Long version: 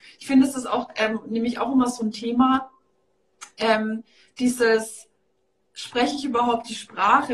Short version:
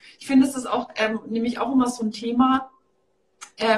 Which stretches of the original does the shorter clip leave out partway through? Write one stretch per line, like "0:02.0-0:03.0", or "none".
none